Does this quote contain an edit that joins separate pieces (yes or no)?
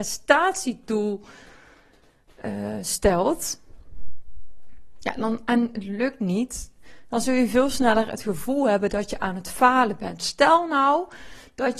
no